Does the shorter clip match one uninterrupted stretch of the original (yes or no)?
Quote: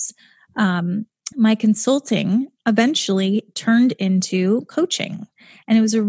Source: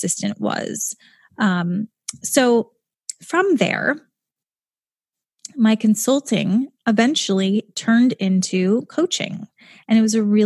no